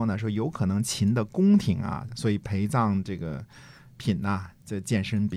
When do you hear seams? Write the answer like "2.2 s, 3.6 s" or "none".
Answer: 2.1 s